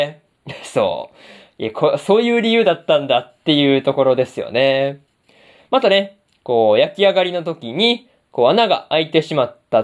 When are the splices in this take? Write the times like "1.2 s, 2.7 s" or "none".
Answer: none